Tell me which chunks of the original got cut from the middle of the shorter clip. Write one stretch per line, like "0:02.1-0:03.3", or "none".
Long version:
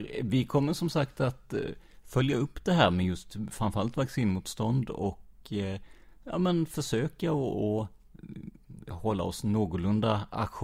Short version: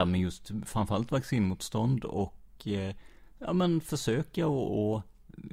none